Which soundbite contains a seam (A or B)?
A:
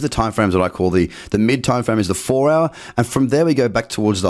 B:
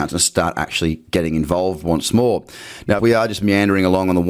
B